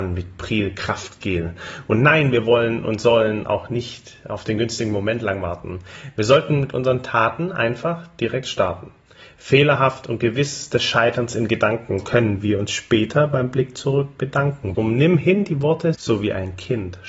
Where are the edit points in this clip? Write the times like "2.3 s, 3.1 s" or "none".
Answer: 12.0 s, 14.7 s, 15.9 s